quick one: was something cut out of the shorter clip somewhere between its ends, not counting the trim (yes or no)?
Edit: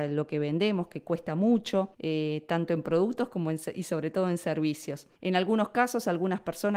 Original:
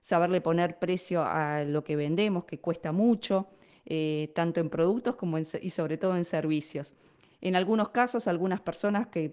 yes